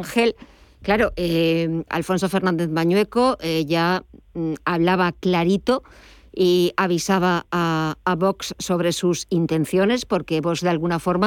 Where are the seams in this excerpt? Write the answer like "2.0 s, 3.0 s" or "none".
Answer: 1.9 s